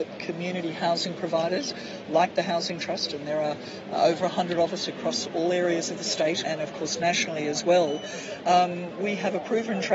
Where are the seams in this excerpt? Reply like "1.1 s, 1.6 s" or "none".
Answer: 6.4 s